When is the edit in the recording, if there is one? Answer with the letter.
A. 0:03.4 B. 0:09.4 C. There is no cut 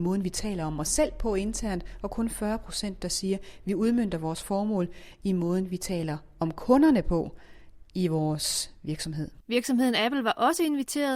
B